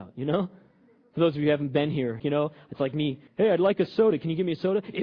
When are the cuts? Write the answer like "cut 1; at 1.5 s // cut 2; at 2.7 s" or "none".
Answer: cut 1; at 2.2 s // cut 2; at 3.3 s